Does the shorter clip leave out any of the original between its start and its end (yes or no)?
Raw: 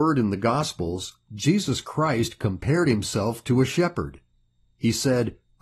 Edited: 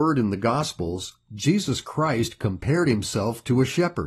no